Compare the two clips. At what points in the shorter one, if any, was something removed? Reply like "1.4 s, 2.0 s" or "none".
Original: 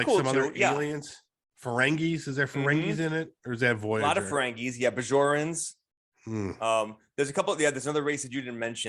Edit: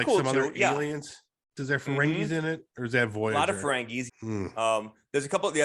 1.6 s, 4.1 s